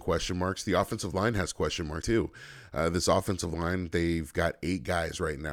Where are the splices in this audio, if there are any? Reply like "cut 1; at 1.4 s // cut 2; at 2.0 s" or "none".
cut 1; at 2.0 s